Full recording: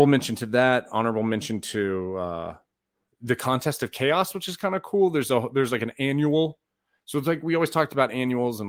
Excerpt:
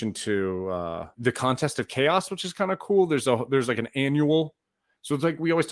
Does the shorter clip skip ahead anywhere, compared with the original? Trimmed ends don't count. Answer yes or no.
yes